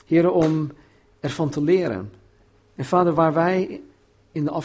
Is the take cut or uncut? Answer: cut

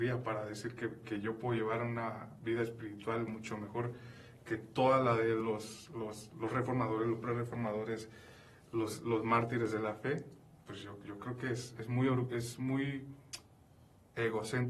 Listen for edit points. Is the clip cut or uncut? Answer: uncut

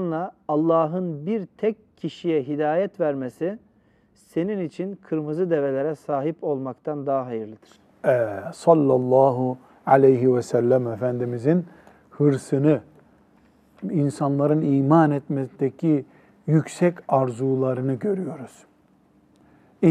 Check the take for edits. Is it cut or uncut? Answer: uncut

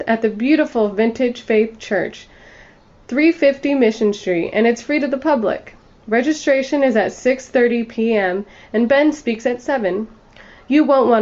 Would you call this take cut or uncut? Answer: uncut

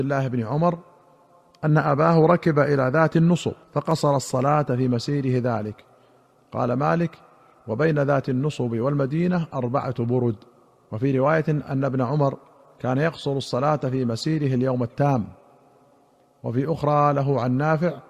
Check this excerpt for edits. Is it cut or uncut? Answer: cut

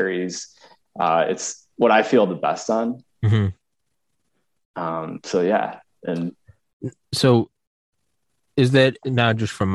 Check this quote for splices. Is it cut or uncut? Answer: uncut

